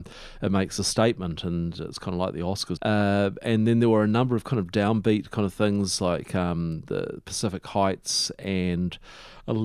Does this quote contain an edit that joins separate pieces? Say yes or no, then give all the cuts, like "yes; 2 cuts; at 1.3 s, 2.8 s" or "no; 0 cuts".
yes; 1 cut; at 2.8 s